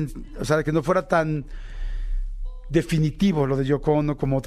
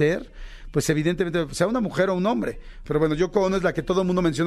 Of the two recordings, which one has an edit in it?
second; 1 cut; at 2.9 s

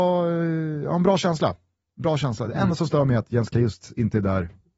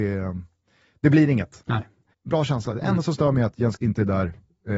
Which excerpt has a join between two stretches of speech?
second; 2 cuts; at 2.1 s, 3.8 s

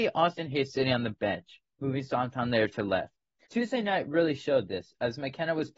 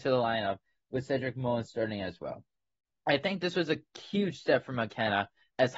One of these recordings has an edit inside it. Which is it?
first; 2 cuts; at 1.7 s, 3.5 s

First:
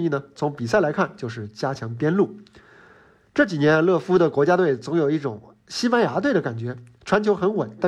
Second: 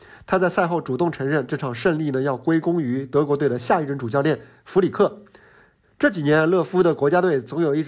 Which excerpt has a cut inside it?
second; 1 cut; at 5.8 s

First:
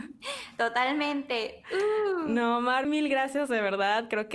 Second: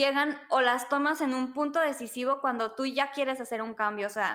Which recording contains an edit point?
first; 1 cut; at 2.8 s

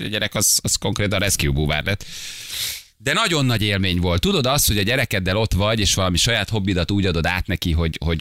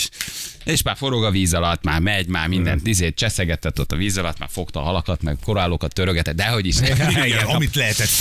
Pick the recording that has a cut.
second; 1 cut; at 7.1 s

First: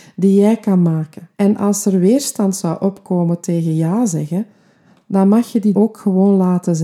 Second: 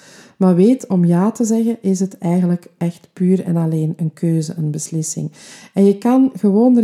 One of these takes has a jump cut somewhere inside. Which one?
first; 2 cuts; at 1.3 s, 5.7 s

